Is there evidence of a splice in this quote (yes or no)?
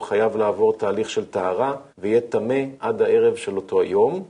yes